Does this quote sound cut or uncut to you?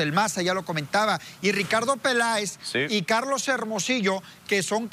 uncut